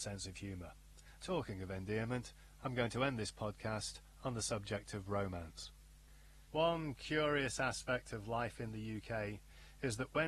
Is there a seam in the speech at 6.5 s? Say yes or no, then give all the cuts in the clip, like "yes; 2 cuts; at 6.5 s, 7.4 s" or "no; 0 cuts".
yes; 2 cuts; at 1.2 s, 6.5 s